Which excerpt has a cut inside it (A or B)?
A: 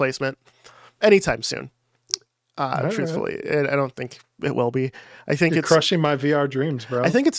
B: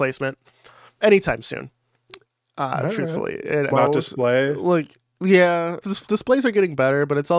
B